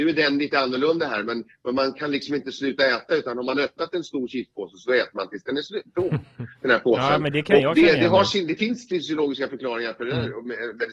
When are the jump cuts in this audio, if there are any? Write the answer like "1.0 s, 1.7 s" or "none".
none